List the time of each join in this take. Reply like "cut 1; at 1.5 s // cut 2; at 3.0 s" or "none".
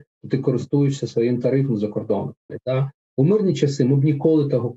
cut 1; at 2.5 s